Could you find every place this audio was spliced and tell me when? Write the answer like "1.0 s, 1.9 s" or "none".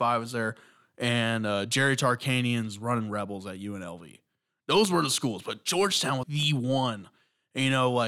6.2 s